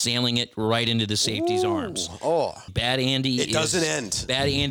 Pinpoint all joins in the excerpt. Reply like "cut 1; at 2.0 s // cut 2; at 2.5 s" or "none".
cut 1; at 2.7 s

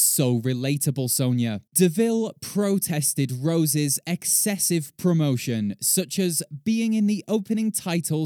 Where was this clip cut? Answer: cut 1; at 1.7 s

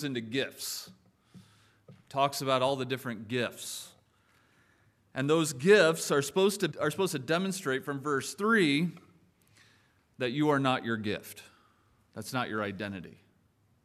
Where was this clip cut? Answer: cut 1; at 6.7 s

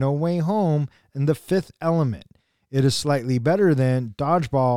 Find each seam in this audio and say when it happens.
none

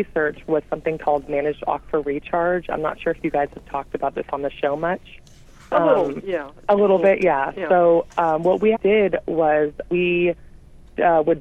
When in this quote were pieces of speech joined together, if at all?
cut 1; at 8.7 s // cut 2; at 9.9 s

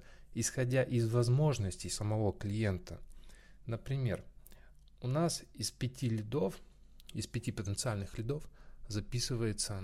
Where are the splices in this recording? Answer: none

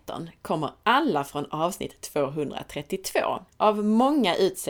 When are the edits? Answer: cut 1; at 3.5 s

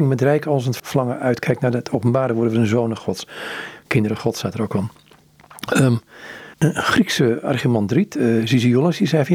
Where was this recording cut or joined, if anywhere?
cut 1; at 6.5 s

